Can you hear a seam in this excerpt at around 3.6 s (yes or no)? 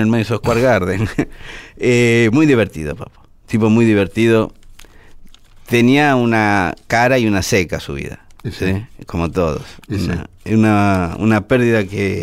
no